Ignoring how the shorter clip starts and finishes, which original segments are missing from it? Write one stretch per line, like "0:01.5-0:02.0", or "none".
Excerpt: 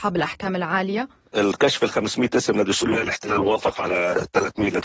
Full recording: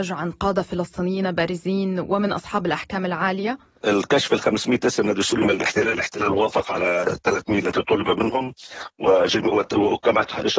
0:05.4-0:05.8